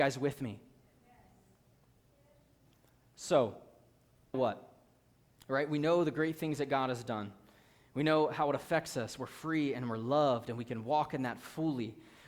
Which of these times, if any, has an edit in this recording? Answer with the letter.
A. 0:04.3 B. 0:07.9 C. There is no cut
A